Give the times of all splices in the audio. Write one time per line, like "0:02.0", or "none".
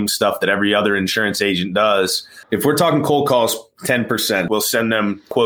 0:02.4
0:04.5